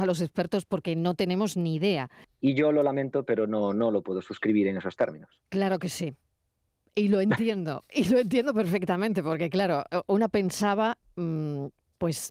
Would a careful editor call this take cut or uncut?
cut